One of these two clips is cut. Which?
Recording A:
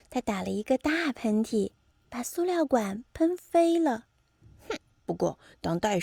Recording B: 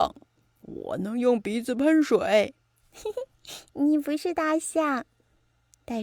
A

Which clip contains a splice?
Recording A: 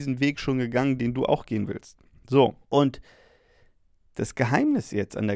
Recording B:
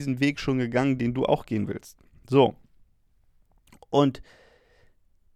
A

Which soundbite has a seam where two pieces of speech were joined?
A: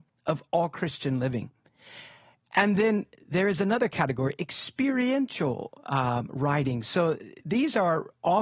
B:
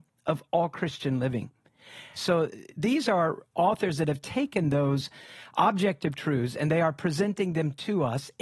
B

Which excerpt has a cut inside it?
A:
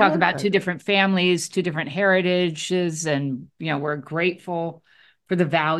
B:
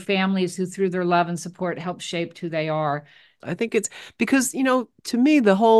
B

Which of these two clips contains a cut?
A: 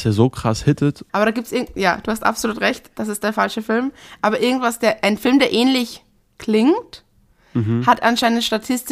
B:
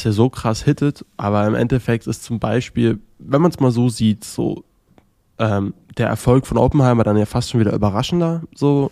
A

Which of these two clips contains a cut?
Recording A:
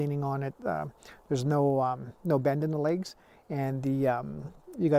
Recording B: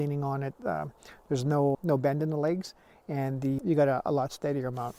B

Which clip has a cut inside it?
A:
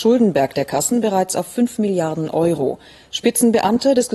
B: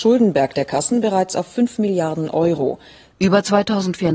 B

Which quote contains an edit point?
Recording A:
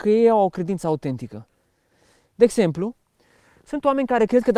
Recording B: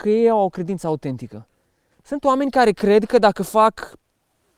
B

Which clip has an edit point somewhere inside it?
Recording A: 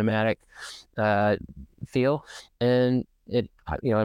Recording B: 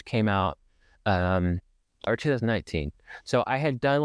B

